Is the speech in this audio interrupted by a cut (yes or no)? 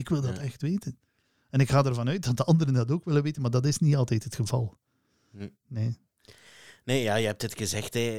no